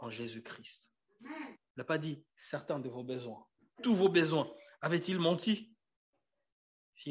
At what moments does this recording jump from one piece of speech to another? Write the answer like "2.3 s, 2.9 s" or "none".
3.8 s